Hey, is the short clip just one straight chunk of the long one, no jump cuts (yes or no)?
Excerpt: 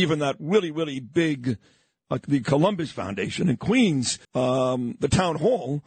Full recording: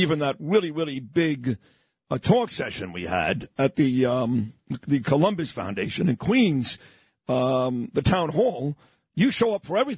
no